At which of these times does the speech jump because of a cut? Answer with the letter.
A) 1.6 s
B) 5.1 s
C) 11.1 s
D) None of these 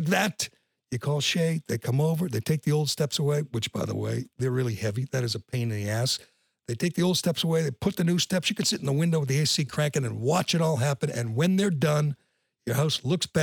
D